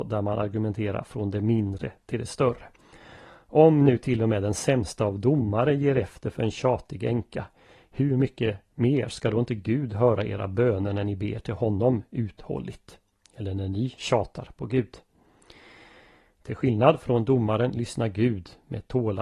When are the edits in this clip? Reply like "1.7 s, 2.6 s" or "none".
none